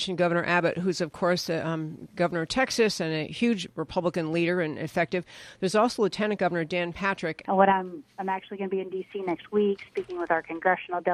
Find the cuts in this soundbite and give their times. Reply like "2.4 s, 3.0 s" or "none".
7.4 s